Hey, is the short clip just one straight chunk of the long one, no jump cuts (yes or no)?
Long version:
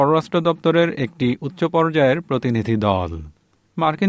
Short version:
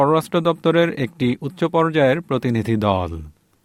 yes